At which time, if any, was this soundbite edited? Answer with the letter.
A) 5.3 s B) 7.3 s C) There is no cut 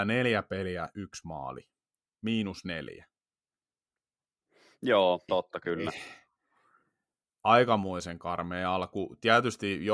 A